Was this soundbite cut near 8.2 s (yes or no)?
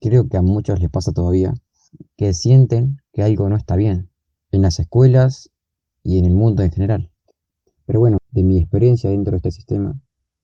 yes